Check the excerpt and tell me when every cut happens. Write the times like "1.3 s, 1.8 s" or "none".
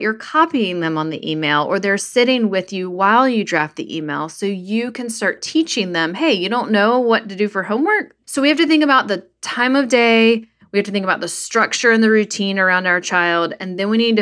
8.2 s